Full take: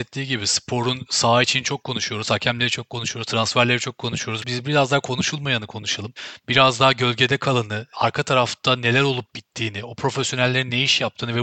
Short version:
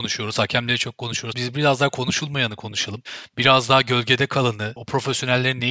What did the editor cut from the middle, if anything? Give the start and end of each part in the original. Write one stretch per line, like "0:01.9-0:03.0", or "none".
0:03.3-0:04.4
0:07.9-0:09.9

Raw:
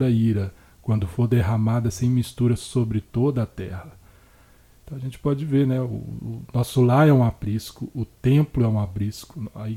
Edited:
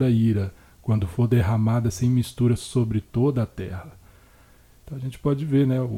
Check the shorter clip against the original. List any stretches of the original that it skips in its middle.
none

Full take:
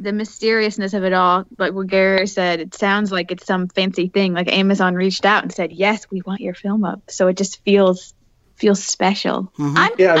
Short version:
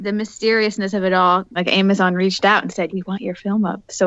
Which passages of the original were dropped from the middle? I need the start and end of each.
0:01.5-0:04.4
0:05.7-0:06.1

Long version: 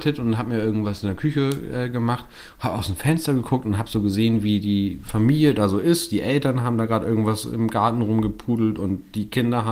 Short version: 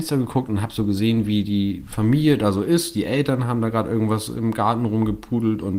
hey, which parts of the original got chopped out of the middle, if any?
none

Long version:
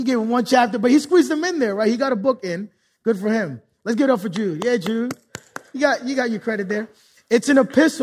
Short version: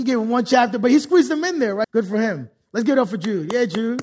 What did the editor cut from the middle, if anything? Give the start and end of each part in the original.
0:01.8-0:03.0

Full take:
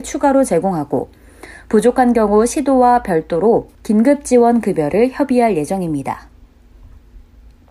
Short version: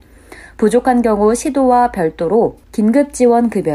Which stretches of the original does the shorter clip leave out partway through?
none

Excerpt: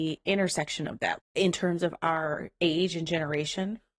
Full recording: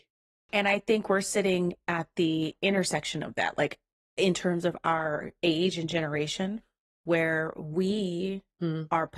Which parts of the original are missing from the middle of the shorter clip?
0:03.5-0:04.0

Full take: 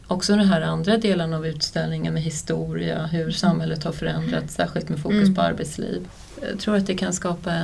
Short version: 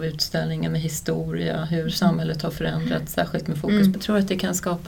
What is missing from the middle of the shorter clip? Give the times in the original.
0:05.4-0:06.5

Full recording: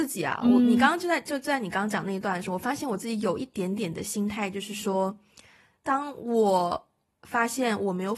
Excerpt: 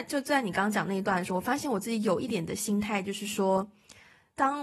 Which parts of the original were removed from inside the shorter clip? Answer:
0:03.5-0:03.8

